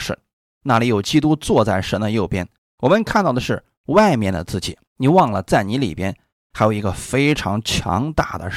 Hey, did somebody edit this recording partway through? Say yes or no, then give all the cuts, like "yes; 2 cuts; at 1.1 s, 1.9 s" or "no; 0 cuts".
yes; 2 cuts; at 2.6 s, 4.9 s